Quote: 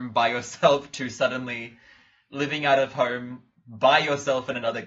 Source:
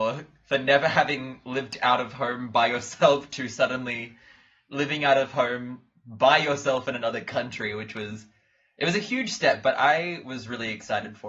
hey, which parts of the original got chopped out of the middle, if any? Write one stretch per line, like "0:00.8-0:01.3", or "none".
none